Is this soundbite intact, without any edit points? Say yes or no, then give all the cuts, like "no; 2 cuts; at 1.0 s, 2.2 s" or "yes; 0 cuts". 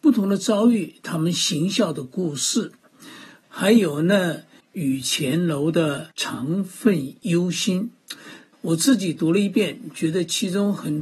no; 2 cuts; at 3.4 s, 8.5 s